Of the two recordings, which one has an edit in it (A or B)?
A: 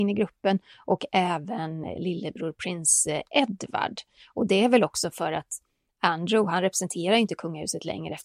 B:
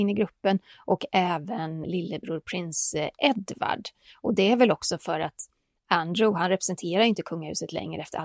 B